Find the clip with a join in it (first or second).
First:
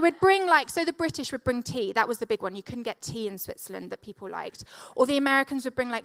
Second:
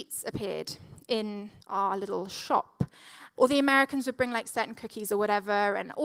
second